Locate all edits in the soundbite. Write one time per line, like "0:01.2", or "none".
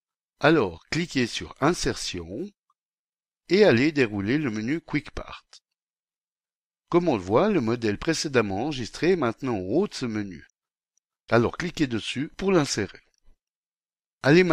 none